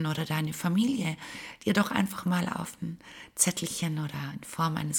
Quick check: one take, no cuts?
yes; 0 cuts

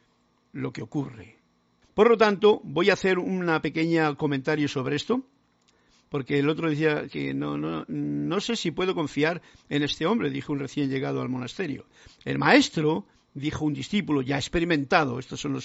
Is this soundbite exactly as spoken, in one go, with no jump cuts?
no; 1 cut; at 1.8 s

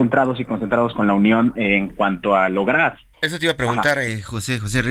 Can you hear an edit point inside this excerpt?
yes; 1 cut; at 3.1 s

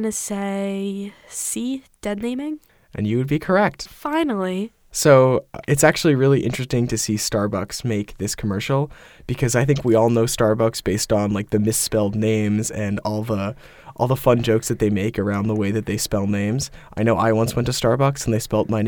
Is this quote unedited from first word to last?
no; 1 cut; at 3.9 s

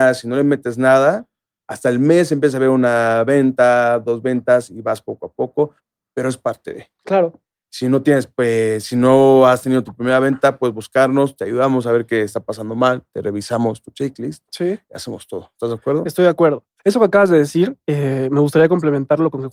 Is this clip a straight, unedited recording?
yes; 0 cuts

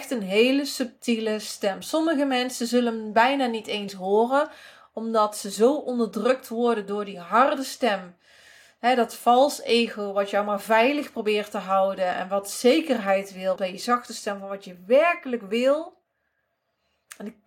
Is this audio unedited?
no; 1 cut; at 13.6 s

